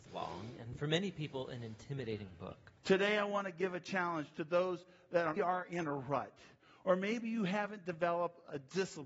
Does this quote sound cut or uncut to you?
cut